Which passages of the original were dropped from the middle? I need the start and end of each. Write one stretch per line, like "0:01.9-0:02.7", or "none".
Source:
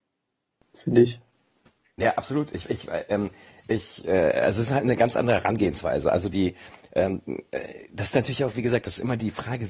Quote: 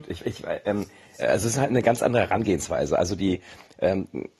0:03.6-0:04.3